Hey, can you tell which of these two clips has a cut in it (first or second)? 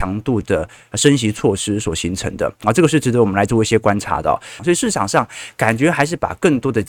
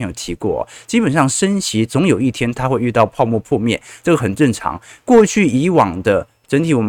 first